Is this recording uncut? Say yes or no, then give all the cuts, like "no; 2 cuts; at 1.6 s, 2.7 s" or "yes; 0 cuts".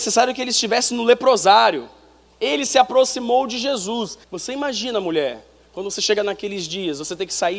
no; 2 cuts; at 2.3 s, 4.2 s